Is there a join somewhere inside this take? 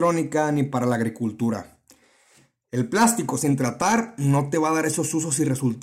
no; 0 cuts

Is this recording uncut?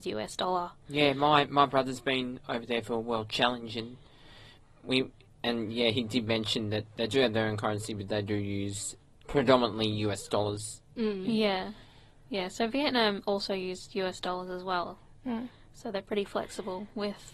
yes; 0 cuts

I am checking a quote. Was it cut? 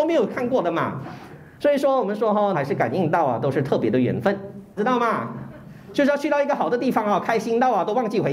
yes; 2 cuts; at 2.5 s, 4.8 s

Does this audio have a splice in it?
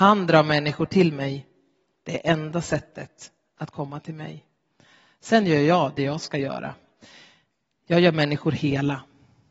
no; 0 cuts

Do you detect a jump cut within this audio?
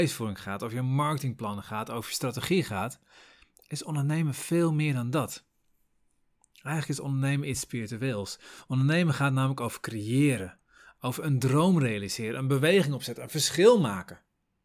no; 0 cuts

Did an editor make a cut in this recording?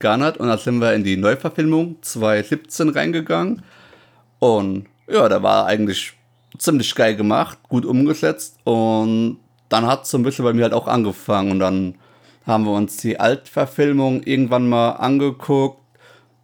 no; 0 cuts

